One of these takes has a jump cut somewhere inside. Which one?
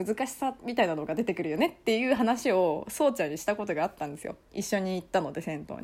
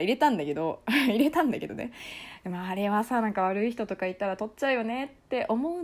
first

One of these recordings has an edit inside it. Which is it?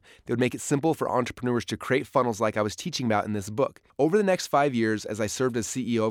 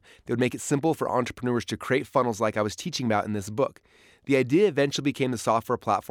first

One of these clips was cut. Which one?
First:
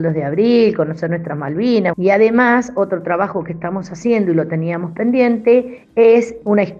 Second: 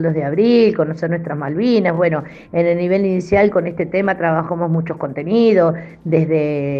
first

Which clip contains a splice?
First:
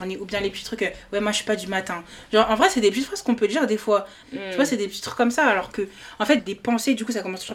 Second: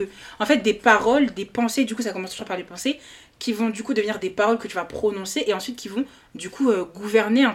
first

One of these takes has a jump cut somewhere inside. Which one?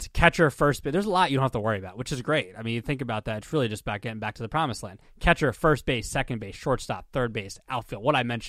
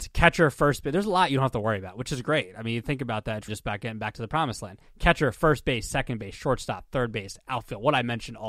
second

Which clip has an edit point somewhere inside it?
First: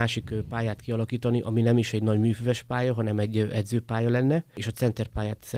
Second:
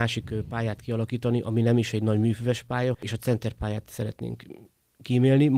second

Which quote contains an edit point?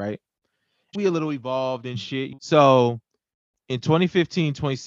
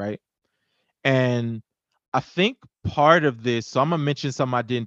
first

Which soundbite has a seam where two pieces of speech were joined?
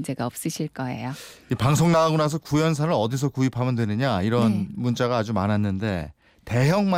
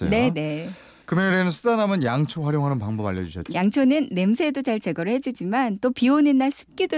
second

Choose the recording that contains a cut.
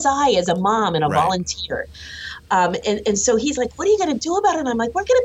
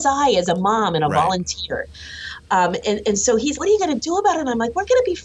second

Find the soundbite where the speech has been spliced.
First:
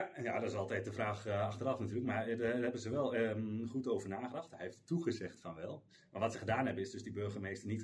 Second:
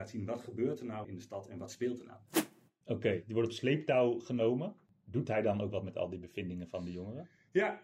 second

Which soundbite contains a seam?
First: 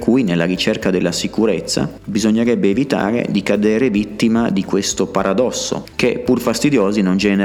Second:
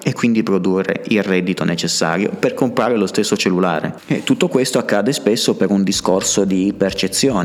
first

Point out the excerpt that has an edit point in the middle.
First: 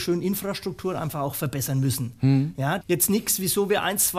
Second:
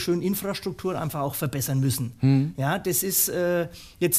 first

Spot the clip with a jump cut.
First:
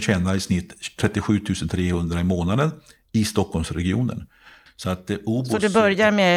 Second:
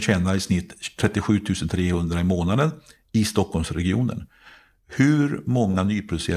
first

